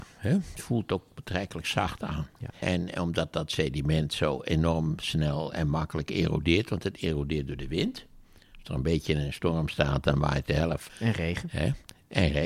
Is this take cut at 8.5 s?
no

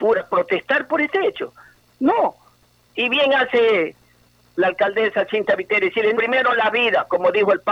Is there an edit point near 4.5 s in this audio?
no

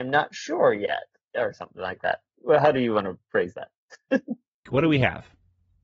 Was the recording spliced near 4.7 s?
yes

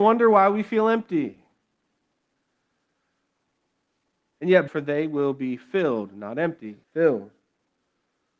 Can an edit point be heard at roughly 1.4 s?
no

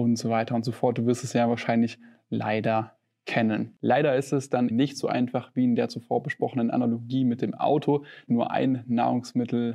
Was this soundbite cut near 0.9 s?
no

